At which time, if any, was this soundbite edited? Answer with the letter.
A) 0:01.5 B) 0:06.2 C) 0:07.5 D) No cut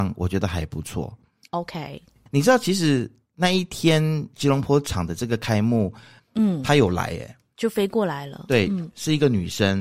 B